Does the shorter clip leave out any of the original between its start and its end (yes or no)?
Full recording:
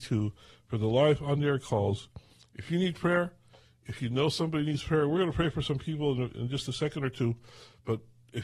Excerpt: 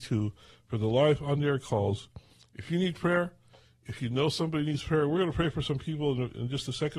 no